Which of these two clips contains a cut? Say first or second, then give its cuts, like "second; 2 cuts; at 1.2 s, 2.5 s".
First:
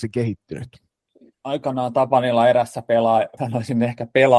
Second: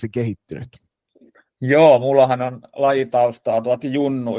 first; 2 cuts; at 1.3 s, 3.4 s